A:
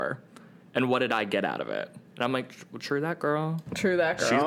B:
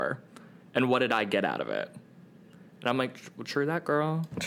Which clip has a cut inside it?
A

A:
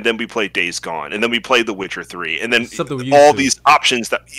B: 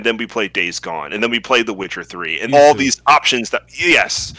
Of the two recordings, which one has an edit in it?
B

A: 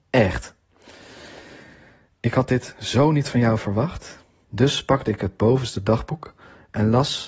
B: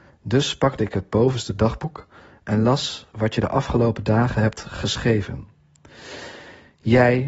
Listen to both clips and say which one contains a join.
A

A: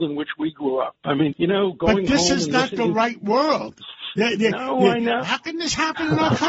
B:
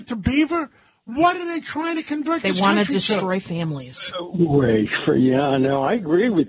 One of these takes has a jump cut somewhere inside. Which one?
A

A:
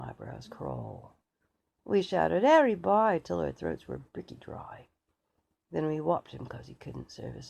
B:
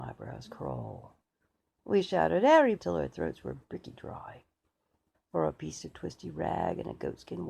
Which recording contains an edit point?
B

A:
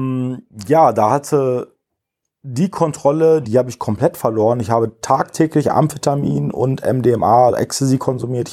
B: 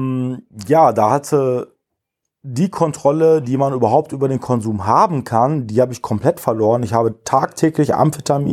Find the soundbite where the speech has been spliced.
A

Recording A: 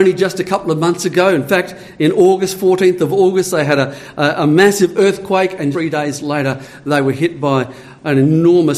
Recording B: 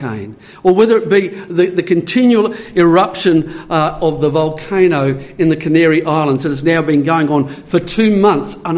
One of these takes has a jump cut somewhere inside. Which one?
A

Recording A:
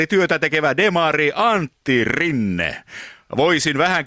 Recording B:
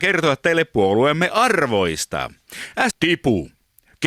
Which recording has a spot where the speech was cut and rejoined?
B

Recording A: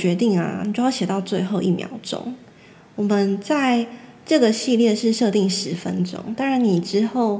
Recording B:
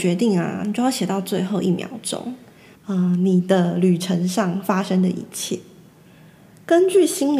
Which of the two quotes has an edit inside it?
B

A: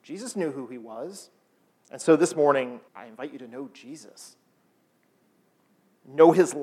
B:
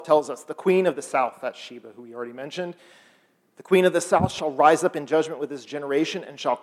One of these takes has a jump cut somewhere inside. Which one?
A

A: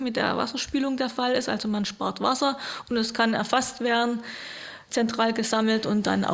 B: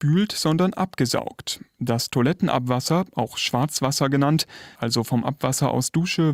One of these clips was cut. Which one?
B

